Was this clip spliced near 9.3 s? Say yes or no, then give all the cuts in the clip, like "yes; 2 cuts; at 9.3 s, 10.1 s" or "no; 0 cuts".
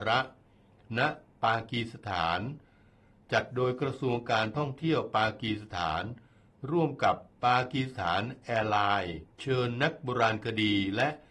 yes; 2 cuts; at 7.3 s, 9.3 s